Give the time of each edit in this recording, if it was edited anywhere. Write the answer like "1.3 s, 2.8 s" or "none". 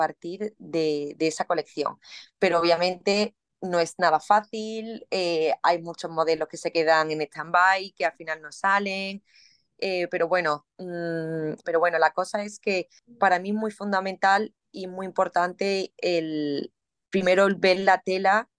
11.6 s